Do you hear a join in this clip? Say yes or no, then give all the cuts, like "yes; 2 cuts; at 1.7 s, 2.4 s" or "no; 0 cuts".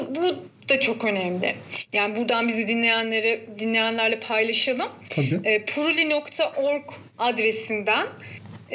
yes; 1 cut; at 1.9 s